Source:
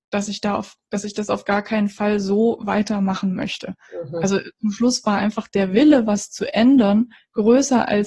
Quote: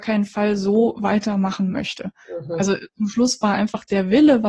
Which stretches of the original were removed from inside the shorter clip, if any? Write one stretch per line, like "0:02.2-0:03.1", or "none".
none